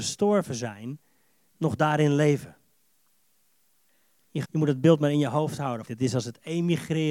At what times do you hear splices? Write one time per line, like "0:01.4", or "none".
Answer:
0:04.4
0:05.9